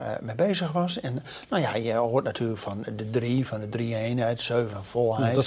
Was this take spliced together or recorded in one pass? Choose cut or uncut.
uncut